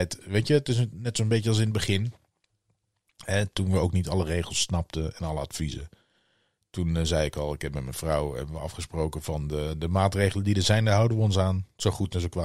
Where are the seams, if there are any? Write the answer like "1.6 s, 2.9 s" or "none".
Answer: none

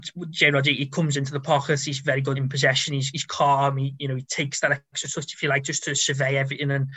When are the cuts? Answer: 2.3 s

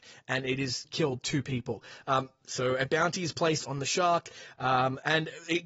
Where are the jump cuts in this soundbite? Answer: none

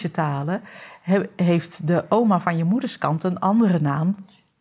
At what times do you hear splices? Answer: none

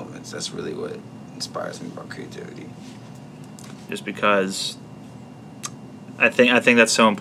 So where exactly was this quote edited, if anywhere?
3.9 s

